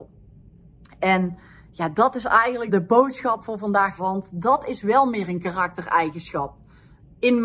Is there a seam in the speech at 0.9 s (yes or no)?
no